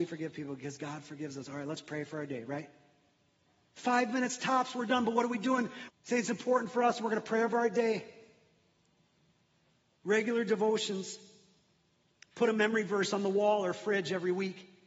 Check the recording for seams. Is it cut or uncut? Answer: cut